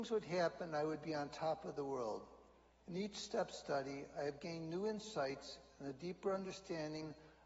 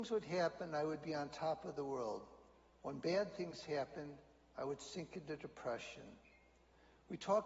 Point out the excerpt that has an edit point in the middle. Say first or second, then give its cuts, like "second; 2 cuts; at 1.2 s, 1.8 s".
first; 1 cut; at 2.7 s